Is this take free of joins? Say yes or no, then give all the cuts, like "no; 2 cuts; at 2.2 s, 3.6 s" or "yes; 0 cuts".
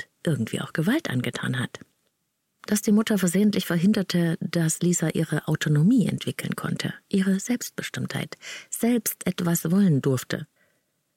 yes; 0 cuts